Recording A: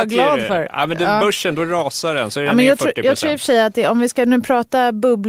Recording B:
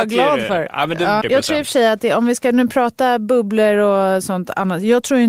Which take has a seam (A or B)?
B